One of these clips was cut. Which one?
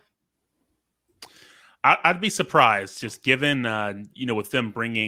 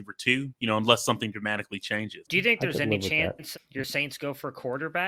second; 2 cuts; at 2.2 s, 3.5 s

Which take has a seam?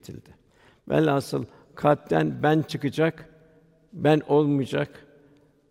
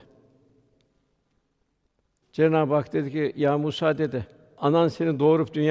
second; 1 cut; at 2.2 s

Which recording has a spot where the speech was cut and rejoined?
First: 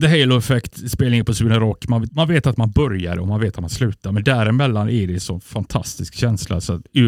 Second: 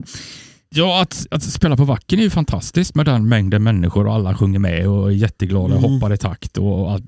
first; 1 cut; at 2.1 s

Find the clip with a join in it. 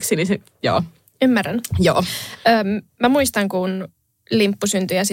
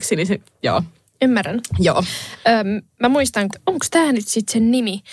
second; 1 cut; at 3.5 s

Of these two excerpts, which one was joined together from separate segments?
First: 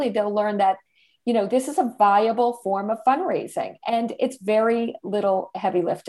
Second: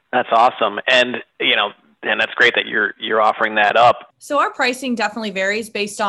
second; 2 cuts; at 2.6 s, 4.1 s

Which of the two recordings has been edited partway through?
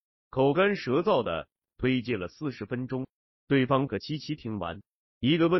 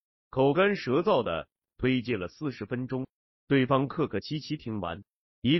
first; 1 cut; at 3.9 s

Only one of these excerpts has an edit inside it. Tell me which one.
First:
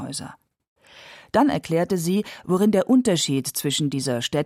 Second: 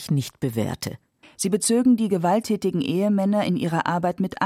second; 1 cut; at 1.2 s

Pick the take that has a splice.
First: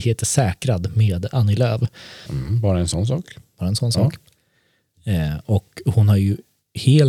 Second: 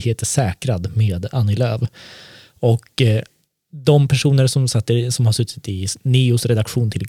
first; 1 cut; at 2.2 s

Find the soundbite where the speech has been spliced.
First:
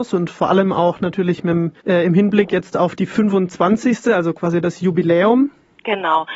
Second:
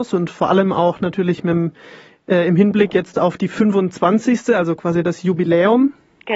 first; 1 cut; at 1.8 s

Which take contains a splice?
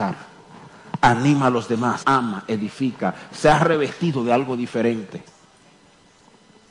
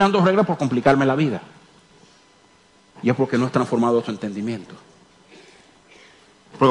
first; 1 cut; at 2.0 s

